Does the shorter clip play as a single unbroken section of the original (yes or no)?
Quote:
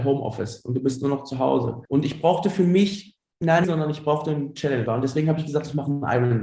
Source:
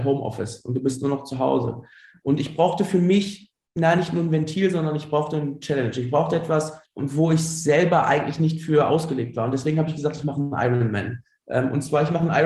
no